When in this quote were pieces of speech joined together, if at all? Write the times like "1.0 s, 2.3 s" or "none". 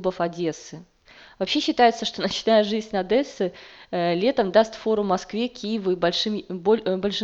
none

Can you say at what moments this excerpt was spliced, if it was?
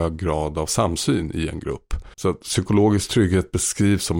2.1 s

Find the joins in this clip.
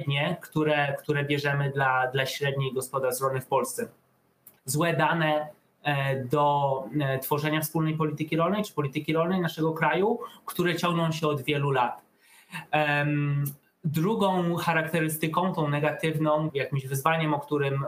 4.6 s, 16.5 s

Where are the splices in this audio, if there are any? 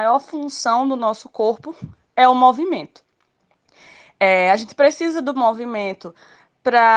none

